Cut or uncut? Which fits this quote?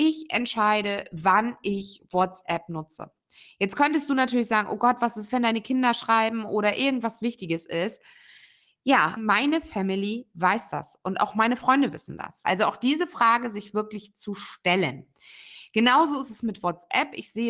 cut